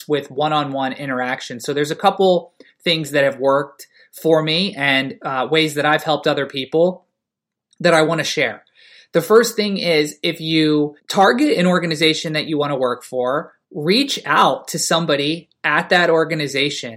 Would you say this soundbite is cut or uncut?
cut